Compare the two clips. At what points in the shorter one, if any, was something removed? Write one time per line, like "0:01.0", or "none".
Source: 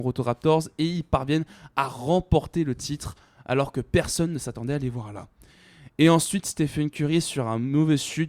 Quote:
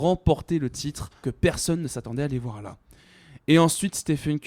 0:01.2